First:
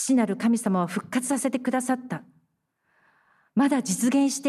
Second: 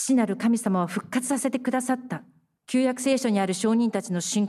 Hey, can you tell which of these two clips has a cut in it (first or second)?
second